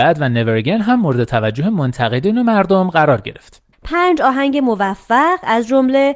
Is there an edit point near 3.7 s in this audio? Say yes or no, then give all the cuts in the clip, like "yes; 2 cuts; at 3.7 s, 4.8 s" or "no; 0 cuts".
yes; 1 cut; at 3.7 s